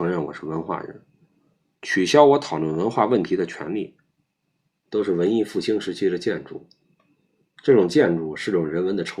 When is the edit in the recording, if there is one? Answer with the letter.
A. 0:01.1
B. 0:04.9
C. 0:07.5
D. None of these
B